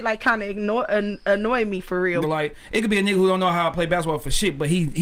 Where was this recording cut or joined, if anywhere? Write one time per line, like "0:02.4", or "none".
0:02.2

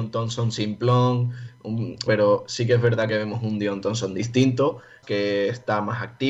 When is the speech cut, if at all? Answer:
0:02.1
0:05.0

